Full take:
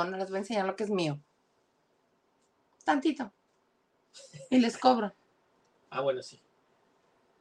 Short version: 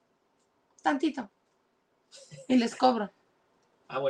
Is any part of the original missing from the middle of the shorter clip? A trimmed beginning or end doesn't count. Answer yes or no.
no